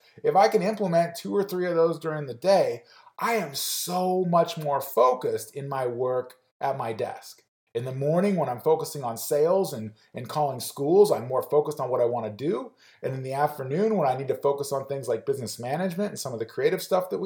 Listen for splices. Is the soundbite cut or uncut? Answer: uncut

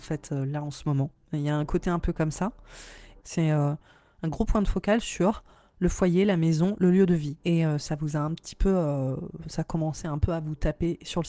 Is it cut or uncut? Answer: cut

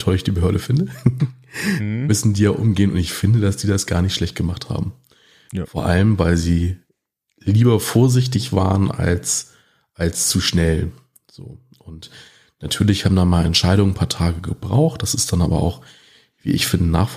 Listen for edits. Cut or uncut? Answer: uncut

